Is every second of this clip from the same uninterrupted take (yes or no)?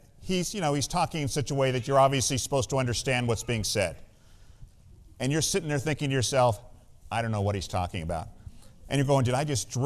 yes